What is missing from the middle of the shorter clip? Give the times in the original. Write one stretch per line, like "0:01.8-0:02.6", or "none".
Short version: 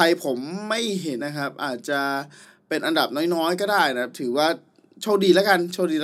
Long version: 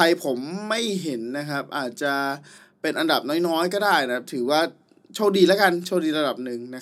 0:01.2-0:01.3